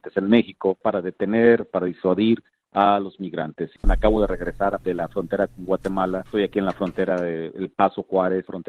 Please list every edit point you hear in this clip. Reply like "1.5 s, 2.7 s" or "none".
3.8 s